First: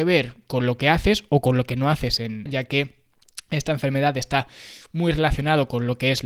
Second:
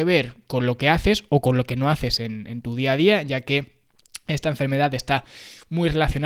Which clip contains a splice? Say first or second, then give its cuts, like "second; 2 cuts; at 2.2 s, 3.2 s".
first; 1 cut; at 2.5 s